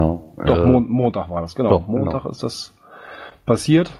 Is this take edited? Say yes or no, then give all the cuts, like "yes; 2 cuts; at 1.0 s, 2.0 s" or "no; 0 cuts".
no; 0 cuts